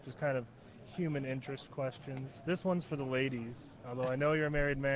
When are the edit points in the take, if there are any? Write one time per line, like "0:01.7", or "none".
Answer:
none